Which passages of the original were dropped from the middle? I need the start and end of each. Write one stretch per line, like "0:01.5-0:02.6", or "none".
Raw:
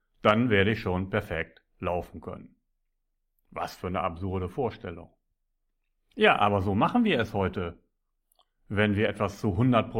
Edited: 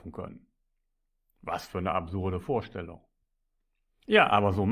none